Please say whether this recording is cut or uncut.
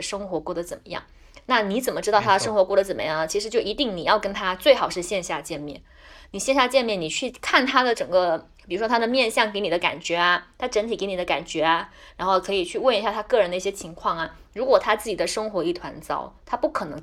uncut